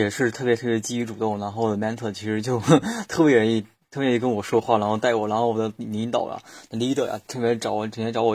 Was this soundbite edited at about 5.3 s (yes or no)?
no